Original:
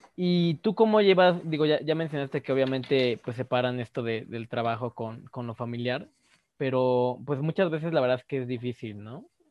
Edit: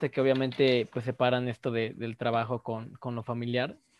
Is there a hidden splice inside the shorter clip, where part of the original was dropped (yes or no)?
no